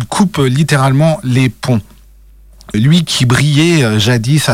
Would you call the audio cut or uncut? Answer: cut